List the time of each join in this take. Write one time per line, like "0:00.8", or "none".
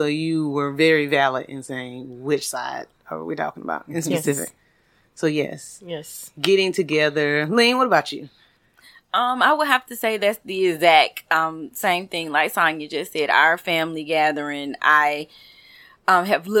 none